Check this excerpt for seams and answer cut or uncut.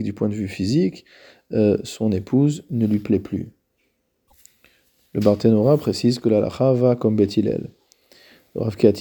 uncut